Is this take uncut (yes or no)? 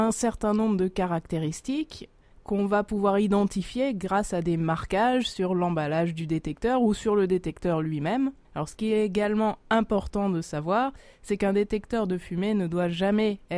no